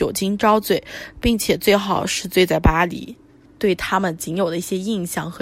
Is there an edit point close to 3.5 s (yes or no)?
yes